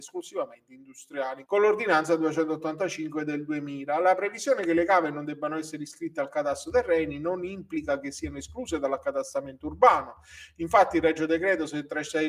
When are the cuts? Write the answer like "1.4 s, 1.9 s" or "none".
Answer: 1.4 s